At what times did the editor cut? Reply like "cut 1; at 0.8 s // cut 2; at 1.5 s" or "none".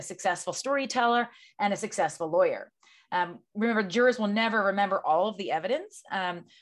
none